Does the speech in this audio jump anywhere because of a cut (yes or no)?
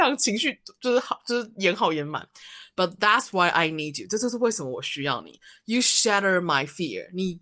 no